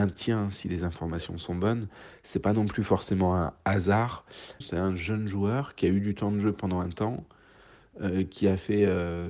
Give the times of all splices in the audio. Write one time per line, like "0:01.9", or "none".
0:04.6